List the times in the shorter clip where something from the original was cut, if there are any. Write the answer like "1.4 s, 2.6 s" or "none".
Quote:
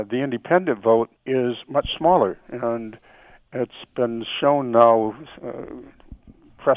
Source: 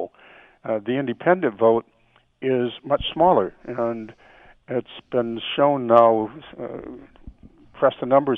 1.2 s